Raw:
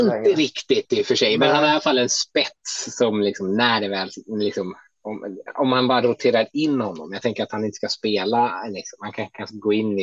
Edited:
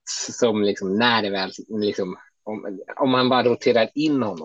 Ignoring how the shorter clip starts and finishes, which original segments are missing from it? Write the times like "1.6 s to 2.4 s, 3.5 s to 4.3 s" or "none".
none